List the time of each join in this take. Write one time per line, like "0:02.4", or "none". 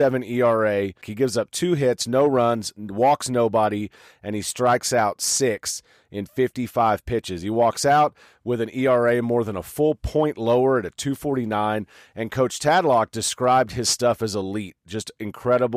0:01.0